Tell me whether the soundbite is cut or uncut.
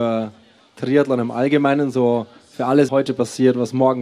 cut